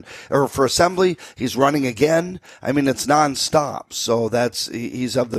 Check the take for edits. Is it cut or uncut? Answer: uncut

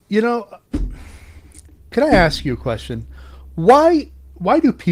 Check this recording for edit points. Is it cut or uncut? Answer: uncut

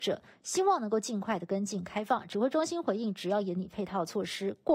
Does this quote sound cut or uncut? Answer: uncut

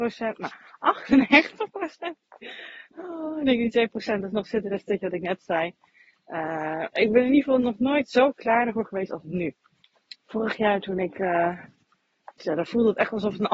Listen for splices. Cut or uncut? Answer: cut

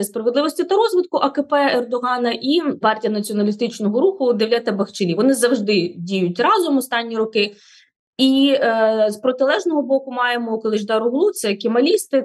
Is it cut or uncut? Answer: uncut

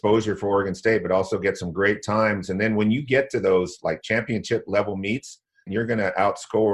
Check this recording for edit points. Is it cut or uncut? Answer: cut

